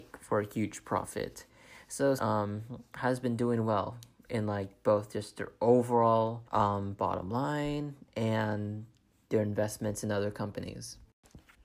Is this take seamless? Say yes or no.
no